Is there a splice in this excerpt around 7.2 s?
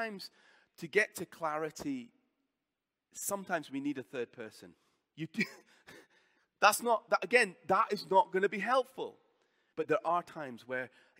no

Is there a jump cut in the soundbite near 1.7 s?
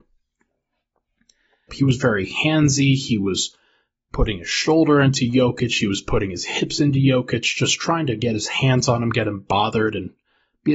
yes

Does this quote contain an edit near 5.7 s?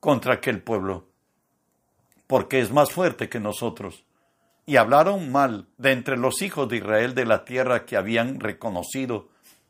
yes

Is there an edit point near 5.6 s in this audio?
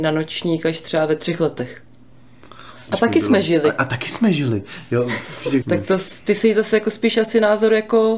yes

